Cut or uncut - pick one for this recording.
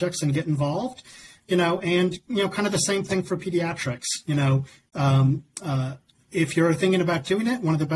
uncut